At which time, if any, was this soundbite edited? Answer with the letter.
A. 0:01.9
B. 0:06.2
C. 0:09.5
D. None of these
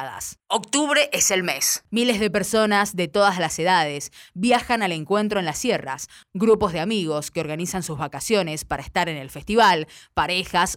A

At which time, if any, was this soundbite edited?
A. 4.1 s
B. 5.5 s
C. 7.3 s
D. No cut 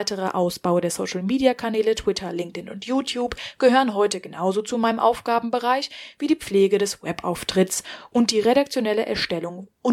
D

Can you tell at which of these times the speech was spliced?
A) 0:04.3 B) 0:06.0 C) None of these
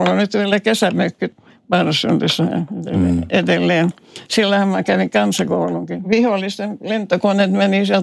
B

